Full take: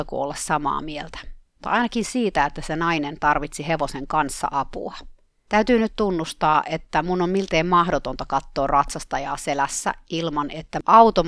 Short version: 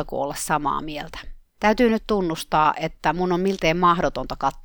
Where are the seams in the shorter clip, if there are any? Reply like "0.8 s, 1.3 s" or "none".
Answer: 1.5 s